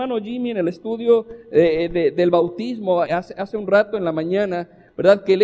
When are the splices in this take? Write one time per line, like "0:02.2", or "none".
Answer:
0:03.1